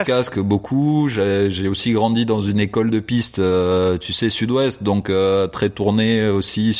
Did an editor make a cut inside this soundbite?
no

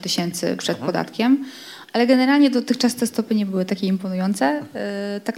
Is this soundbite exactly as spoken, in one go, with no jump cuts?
yes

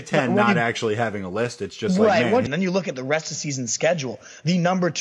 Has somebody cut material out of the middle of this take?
yes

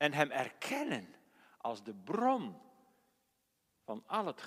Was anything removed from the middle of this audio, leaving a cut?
no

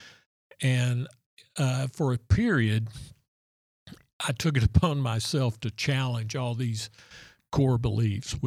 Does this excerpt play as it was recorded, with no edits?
yes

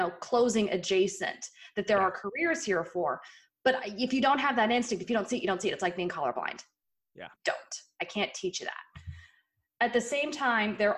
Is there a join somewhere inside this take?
yes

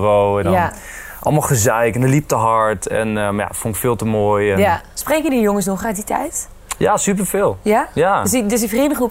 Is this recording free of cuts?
yes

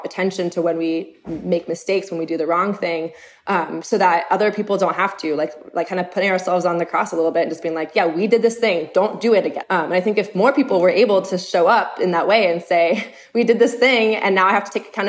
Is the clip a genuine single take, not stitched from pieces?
no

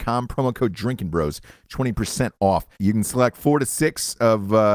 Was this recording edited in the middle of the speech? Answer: yes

